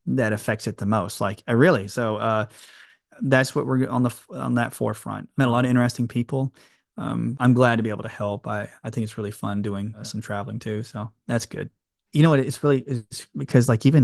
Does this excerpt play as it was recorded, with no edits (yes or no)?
no